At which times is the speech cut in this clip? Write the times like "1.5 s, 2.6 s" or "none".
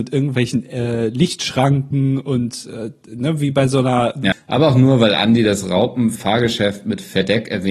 4.3 s